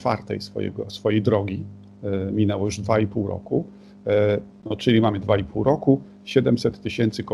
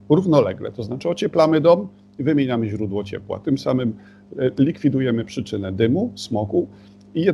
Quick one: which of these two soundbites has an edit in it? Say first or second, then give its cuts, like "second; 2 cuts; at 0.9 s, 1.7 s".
first; 1 cut; at 4.5 s